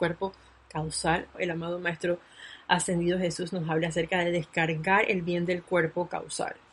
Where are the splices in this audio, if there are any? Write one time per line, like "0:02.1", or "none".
0:01.3